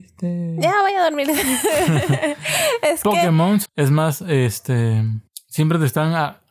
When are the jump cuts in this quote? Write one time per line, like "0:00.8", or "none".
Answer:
0:03.7